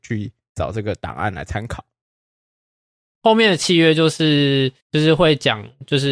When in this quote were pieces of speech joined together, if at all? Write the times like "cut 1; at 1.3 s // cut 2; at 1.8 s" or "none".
cut 1; at 3.1 s // cut 2; at 4.8 s